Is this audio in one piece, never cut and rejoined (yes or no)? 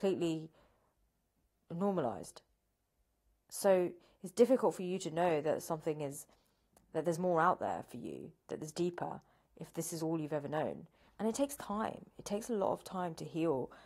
no